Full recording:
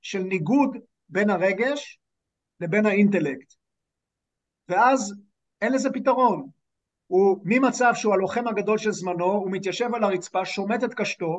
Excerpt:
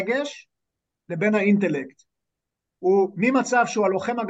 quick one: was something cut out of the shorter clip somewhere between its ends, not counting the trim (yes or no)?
yes